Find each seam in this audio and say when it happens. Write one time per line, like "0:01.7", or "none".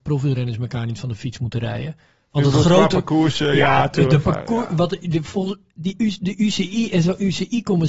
none